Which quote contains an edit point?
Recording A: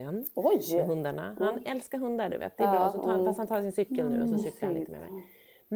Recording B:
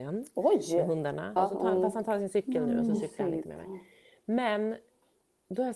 B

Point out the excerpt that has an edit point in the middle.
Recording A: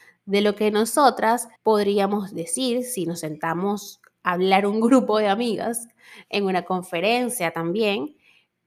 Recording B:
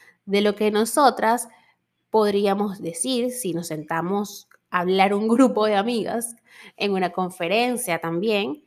A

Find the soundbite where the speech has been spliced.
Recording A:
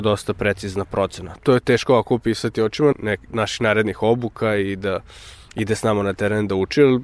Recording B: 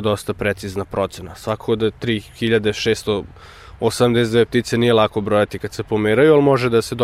A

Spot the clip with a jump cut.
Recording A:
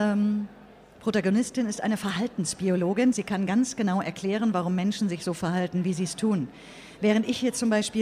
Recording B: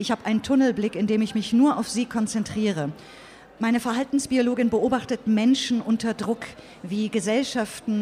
A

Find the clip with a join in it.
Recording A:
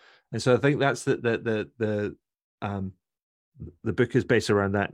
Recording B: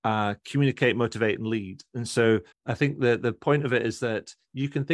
B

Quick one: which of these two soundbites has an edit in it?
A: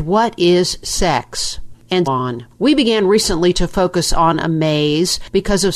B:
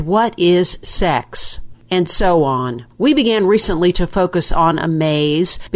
A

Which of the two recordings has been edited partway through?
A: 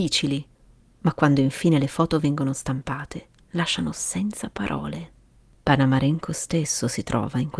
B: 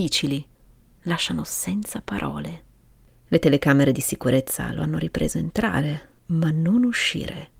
B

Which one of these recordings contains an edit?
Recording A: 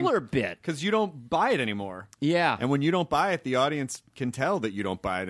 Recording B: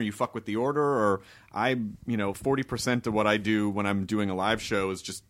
B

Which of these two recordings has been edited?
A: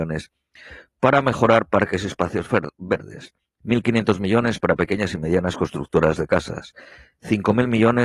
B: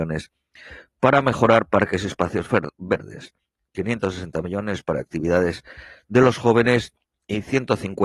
A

